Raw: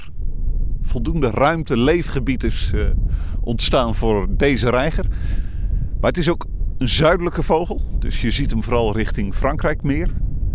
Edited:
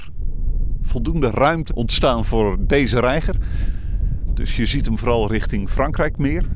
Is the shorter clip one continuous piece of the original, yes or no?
no